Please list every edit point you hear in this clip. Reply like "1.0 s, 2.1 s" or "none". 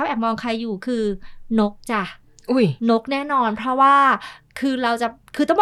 2.8 s